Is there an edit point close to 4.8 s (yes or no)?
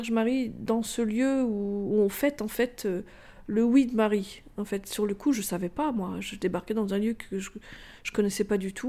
no